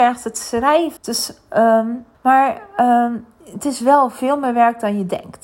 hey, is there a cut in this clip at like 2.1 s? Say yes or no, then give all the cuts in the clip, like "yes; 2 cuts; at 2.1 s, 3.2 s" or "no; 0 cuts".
yes; 2 cuts; at 1.0 s, 2.1 s